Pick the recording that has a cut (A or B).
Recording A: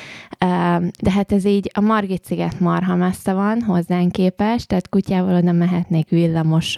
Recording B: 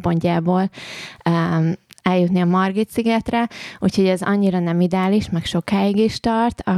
A